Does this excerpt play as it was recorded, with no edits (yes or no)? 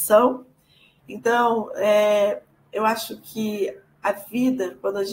no